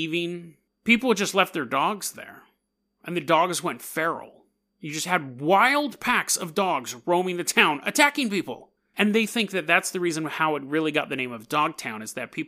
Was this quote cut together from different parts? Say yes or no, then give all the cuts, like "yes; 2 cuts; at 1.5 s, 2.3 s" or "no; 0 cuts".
no; 0 cuts